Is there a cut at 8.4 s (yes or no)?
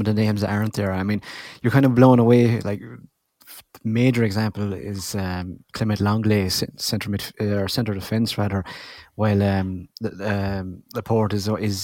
no